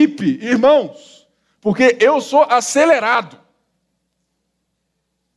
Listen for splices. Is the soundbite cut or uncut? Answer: cut